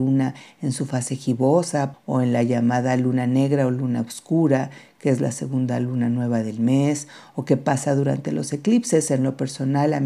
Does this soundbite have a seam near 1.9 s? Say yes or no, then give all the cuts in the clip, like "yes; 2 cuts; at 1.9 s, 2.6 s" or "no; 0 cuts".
yes; 1 cut; at 1.9 s